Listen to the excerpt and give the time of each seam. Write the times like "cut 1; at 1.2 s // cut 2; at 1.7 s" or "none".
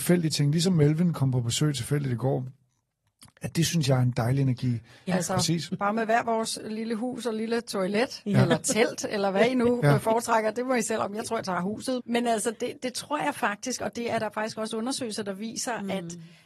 cut 1; at 5.1 s // cut 2; at 12.0 s